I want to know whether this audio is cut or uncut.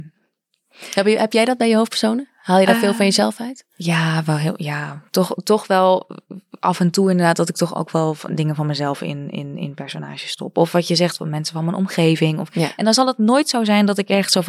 uncut